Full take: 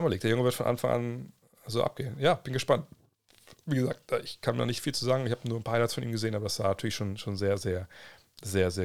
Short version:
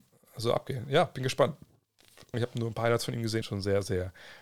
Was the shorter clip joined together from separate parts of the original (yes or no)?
yes